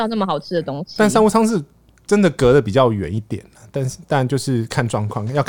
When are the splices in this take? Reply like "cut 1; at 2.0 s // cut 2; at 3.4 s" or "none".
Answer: none